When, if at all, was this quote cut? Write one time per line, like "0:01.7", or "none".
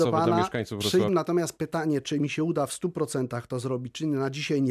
0:01.1

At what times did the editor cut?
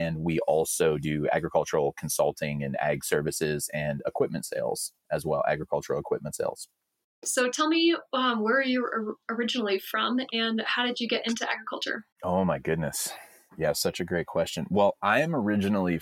0:12.1

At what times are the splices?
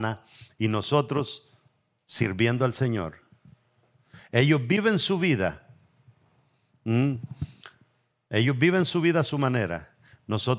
none

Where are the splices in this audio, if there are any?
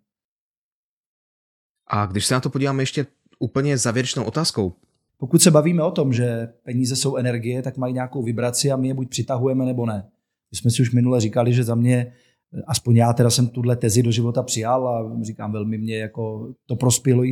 0:05.1

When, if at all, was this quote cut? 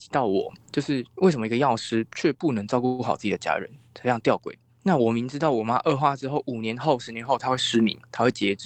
none

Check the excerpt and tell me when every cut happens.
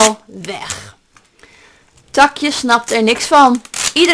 none

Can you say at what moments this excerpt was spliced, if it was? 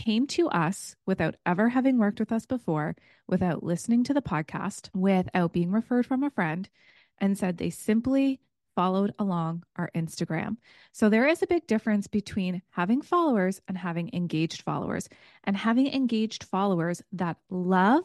none

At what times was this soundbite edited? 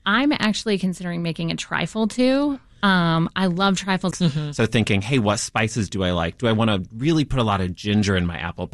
0:04.1

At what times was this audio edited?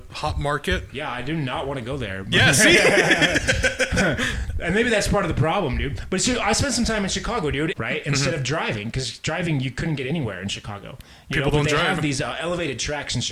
0:07.7

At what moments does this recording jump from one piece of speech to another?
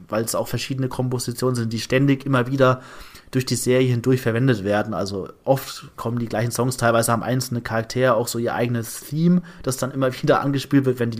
none

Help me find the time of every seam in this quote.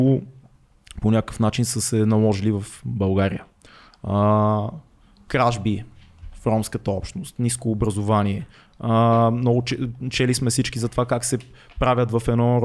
none

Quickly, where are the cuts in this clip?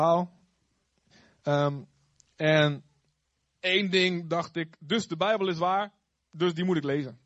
none

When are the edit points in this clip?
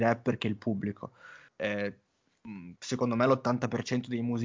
0:01.5
0:02.8

